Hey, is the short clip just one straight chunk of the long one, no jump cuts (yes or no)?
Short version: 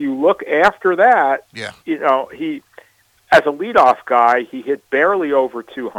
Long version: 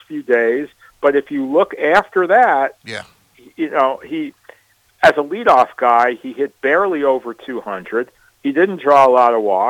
no